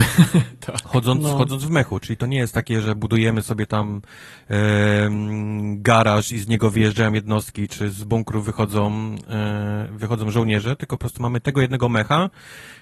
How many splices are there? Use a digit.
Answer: 0